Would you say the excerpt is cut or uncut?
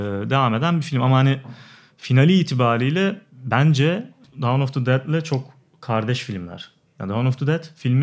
uncut